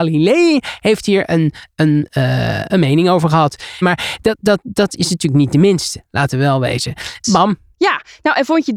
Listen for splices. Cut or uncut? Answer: cut